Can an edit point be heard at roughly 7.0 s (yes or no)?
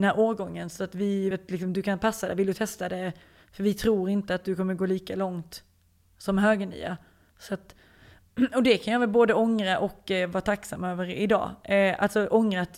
no